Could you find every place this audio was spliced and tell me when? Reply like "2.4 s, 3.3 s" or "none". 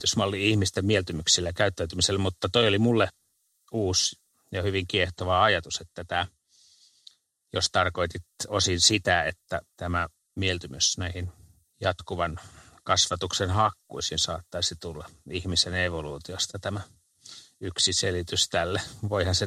none